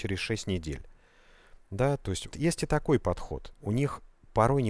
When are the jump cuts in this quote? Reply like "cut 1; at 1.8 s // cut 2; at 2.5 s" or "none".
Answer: cut 1; at 2.3 s // cut 2; at 3.5 s